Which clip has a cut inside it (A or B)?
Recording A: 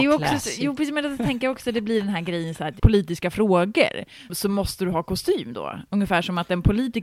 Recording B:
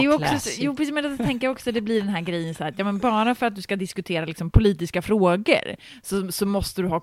A